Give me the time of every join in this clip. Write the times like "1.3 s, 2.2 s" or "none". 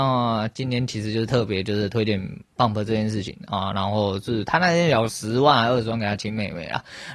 5.1 s